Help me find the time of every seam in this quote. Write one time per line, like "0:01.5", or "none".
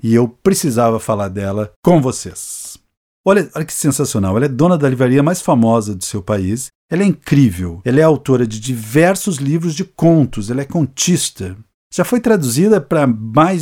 0:03.2
0:06.7